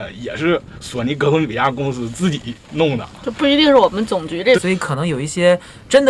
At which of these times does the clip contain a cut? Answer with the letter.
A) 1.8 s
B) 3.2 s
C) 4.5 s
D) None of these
C